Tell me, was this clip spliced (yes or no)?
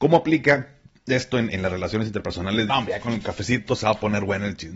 yes